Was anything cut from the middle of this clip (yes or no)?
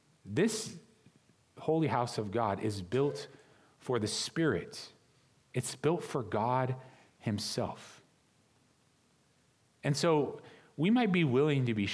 no